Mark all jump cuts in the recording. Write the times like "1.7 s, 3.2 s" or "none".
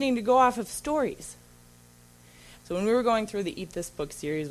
2.6 s

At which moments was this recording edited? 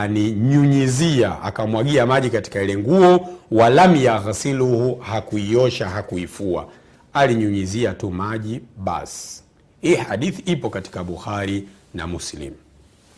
none

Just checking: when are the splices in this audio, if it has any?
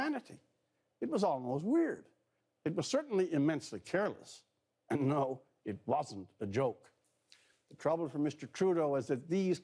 none

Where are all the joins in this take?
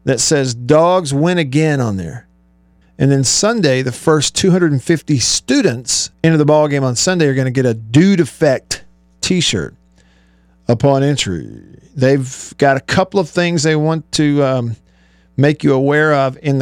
2.8 s, 6.1 s

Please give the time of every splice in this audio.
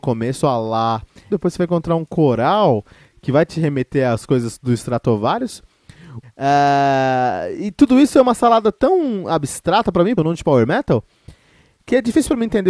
1.3 s, 6.2 s, 10.2 s

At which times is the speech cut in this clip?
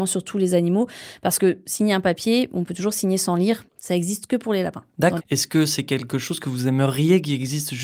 3.7 s, 5.2 s

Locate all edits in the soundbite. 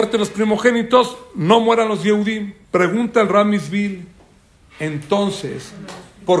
2.6 s

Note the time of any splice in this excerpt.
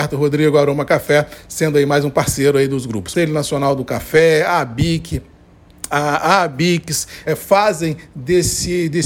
3.1 s, 5.9 s, 7.3 s

